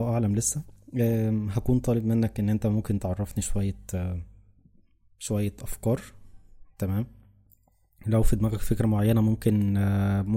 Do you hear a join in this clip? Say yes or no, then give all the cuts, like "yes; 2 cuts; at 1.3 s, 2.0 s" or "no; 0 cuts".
no; 0 cuts